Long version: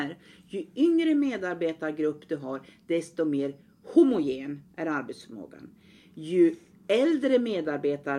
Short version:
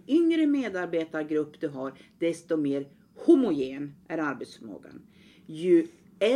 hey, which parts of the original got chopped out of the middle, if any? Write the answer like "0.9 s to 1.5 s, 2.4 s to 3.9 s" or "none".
none